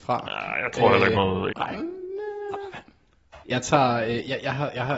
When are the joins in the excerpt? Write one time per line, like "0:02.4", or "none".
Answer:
0:01.5
0:03.4